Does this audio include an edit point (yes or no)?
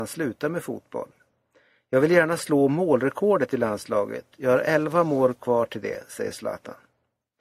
no